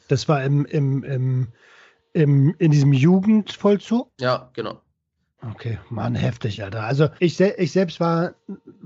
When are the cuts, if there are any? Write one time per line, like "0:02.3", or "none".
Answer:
0:07.2